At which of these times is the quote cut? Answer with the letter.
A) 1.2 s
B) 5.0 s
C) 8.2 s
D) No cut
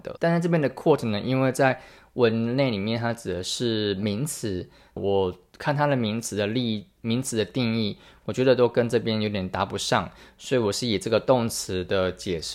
B